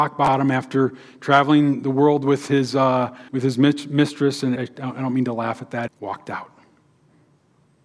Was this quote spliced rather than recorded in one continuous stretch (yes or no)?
yes